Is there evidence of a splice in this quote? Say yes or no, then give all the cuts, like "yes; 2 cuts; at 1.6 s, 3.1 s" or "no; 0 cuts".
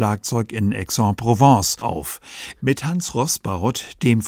yes; 1 cut; at 2.6 s